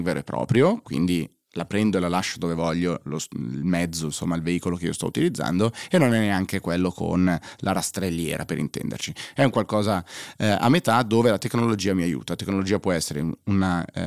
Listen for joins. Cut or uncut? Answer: uncut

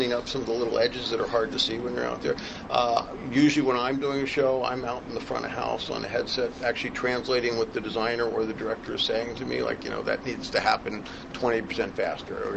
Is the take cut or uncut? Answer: uncut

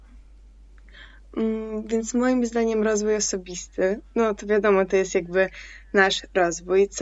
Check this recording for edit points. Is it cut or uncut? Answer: uncut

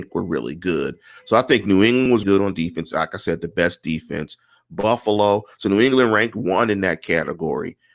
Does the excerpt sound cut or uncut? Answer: cut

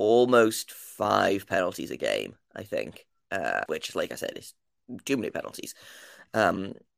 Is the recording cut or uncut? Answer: cut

